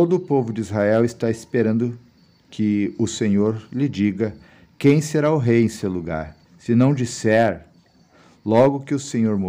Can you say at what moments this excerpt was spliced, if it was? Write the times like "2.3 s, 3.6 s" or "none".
6.4 s

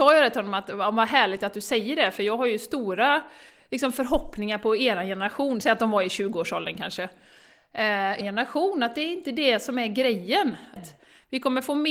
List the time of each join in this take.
8.2 s, 10.8 s

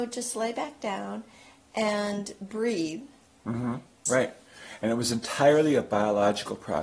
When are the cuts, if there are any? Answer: 4.1 s

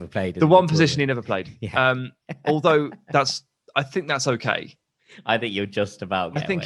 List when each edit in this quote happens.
none

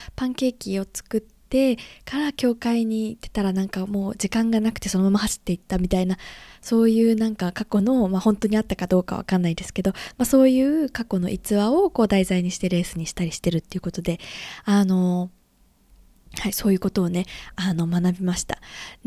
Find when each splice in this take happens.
none

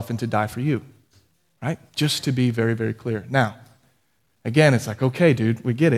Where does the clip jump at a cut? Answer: none

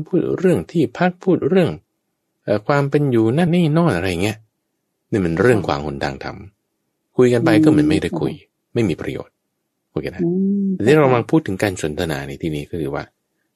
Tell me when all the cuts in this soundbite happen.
3.5 s

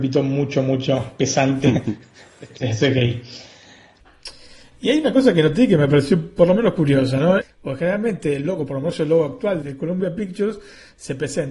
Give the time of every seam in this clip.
7.4 s, 9.6 s

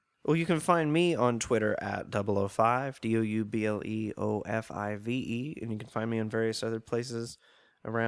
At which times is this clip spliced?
none

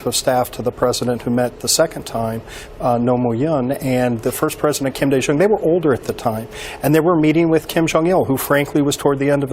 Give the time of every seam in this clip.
none

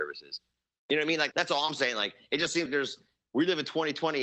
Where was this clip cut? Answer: 1.3 s, 2.7 s

